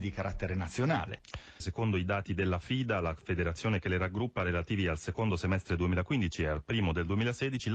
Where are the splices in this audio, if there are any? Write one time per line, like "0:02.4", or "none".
0:01.6